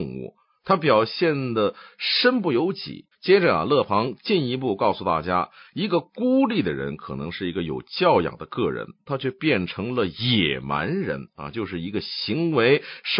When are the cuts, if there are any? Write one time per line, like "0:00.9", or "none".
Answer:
0:03.1
0:09.1